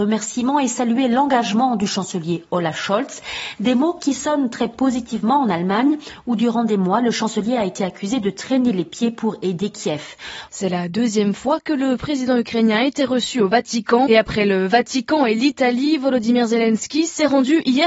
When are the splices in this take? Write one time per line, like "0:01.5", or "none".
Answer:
0:10.5
0:14.1